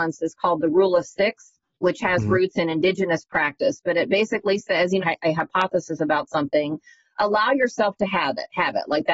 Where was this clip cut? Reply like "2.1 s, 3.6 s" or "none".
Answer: 5.0 s

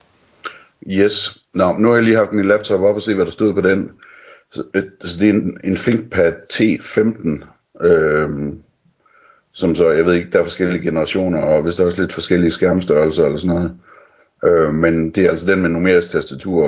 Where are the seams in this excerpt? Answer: none

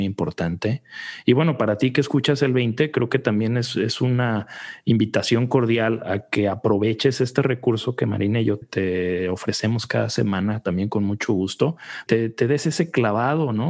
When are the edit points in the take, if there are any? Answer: 8.6 s, 12.1 s

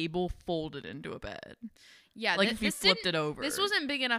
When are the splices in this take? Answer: none

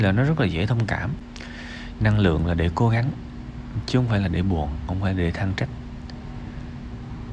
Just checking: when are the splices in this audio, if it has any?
2.0 s

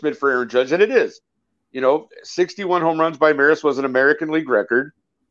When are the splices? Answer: none

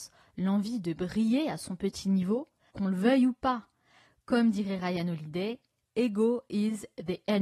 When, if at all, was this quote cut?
2.7 s

